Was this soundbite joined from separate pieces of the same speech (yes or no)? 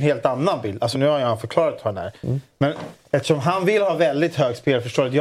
yes